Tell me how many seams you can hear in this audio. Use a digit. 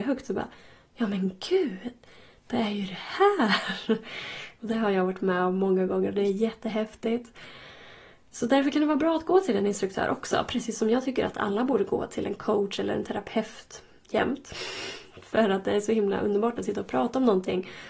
0